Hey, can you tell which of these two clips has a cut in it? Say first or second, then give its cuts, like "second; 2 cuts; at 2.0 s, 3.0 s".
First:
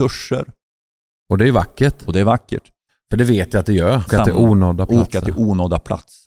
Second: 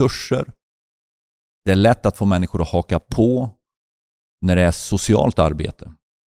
first; 3 cuts; at 1.1 s, 2.9 s, 4.1 s